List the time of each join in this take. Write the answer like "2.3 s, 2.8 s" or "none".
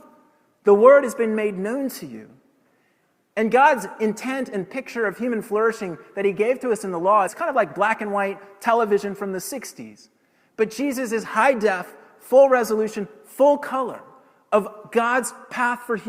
7.3 s

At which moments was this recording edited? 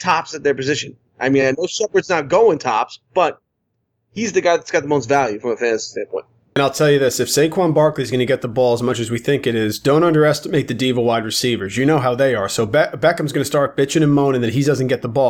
none

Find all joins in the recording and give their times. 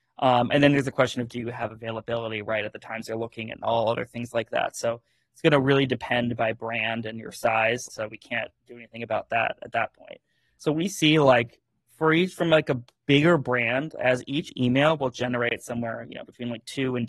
7.9 s

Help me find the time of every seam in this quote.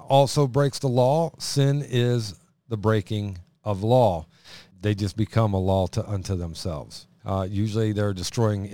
4.7 s, 7.1 s

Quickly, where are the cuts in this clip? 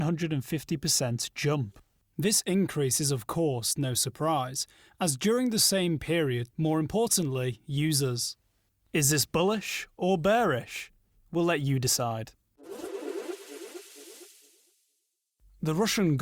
6.5 s

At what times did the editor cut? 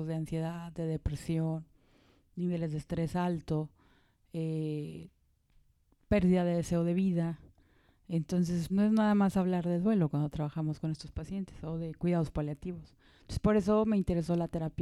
8.7 s

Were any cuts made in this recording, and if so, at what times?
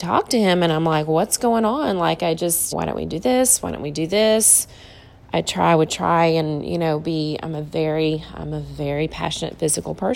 2.7 s

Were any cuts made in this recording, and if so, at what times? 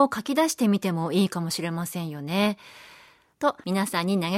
3.3 s

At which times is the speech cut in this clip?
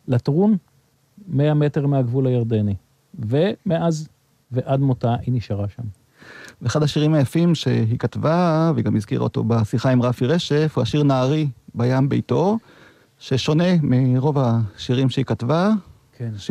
none

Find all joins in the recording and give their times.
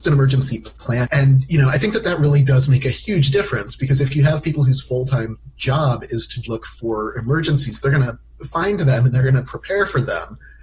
1.0 s, 6.4 s

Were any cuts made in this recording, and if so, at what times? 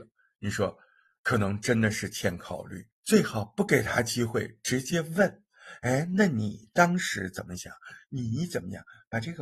2.9 s

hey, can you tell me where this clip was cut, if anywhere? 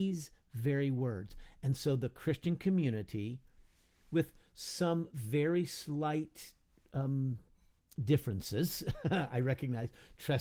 none

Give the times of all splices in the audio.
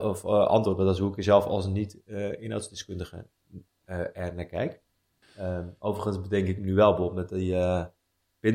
5.2 s

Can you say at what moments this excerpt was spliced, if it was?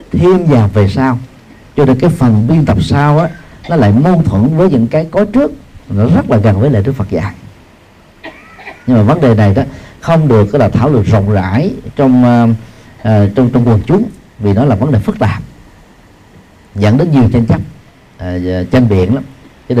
none

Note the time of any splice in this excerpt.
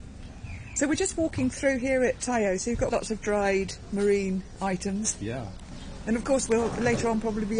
none

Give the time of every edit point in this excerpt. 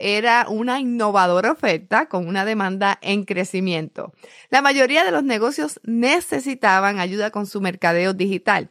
none

